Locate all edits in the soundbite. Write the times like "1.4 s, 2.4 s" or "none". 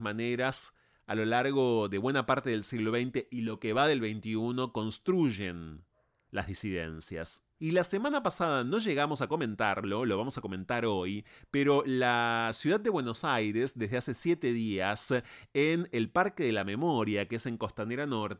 7.6 s